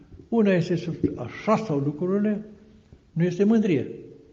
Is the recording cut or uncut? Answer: uncut